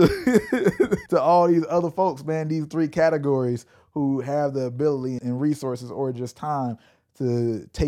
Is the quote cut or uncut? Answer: cut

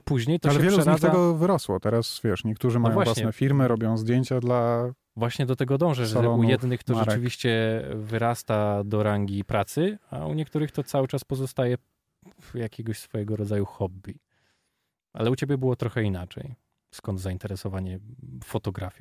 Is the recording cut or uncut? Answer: uncut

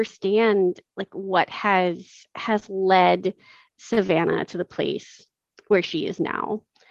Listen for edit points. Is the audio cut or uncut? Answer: uncut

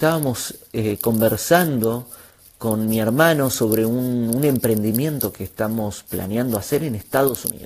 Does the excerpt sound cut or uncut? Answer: uncut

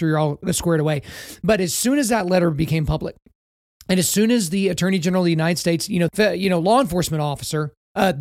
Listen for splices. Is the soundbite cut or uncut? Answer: cut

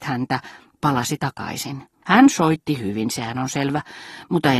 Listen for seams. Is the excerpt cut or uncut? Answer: cut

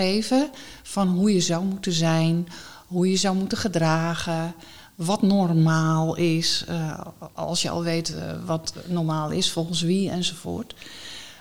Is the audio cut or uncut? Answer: uncut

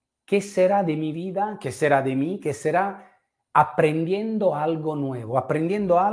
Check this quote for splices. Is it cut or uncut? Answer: uncut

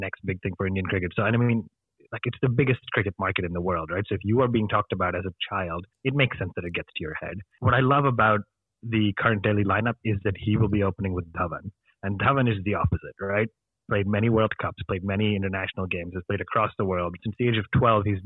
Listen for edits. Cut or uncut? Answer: cut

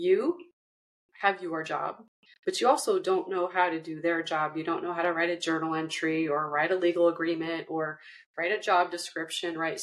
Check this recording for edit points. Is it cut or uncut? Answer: uncut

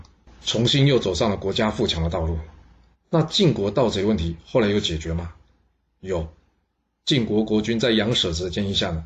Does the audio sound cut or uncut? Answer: cut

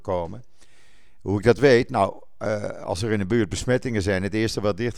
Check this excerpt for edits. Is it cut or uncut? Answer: uncut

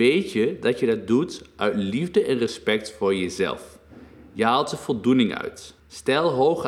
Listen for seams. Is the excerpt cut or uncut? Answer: cut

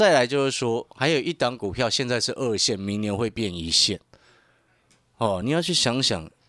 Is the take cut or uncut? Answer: uncut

